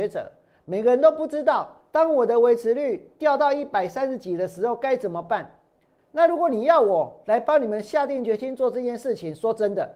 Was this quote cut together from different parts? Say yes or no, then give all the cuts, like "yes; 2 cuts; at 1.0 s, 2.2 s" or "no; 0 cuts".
yes; 1 cut; at 6.0 s